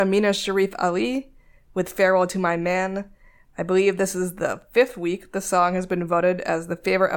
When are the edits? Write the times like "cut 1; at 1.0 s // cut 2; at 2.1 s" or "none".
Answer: none